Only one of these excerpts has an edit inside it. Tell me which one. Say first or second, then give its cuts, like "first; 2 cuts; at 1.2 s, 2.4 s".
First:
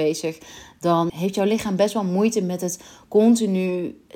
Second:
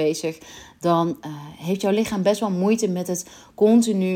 first; 1 cut; at 1.1 s